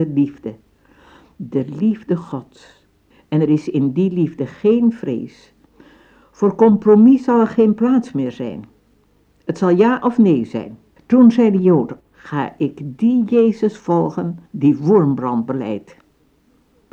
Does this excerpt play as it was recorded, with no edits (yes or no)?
no